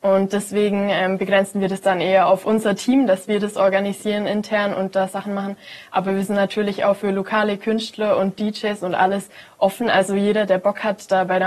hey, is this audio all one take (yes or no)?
yes